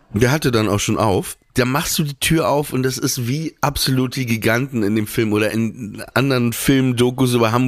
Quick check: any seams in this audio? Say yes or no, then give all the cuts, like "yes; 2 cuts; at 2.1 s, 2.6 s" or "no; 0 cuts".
yes; 1 cut; at 6.1 s